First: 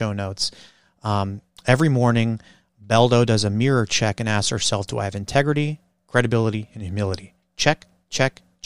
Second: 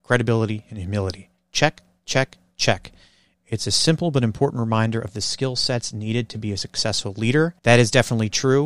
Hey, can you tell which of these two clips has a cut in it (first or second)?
second